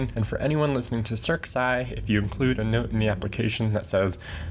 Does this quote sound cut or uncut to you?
uncut